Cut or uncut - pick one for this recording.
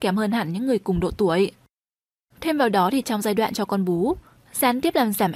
cut